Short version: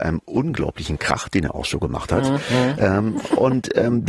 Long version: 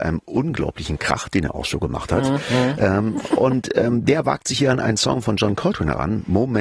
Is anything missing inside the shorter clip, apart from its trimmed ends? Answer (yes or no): no